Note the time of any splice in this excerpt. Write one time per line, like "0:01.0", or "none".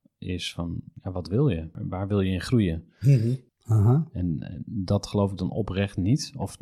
0:03.5

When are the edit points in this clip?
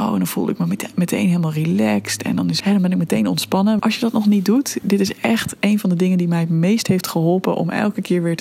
0:02.6
0:03.8

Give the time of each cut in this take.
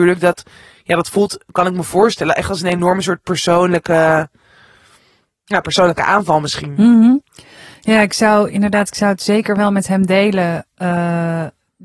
none

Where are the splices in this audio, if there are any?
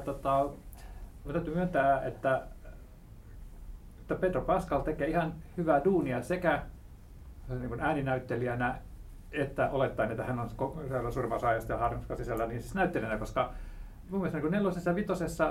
0:01.2
0:14.0

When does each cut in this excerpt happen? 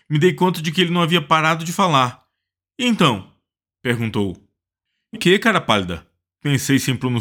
0:05.1

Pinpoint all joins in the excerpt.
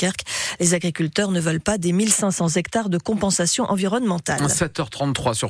none

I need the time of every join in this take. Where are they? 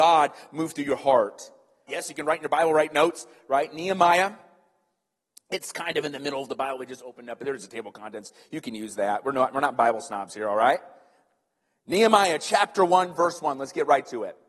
0:01.9

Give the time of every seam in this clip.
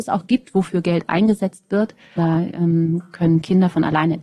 0:02.2

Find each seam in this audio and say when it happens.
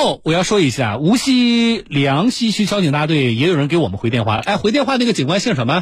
none

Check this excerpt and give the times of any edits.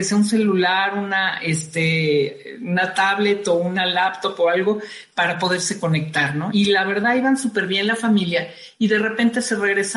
0:06.5

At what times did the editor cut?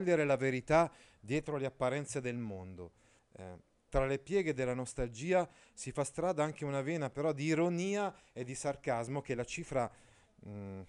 0:03.2

